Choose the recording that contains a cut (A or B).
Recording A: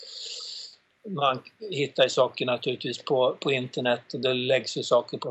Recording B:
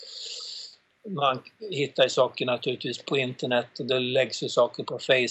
B